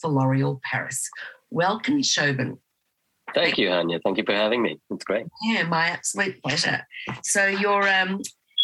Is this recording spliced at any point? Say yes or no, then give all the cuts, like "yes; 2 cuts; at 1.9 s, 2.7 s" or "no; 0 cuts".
no; 0 cuts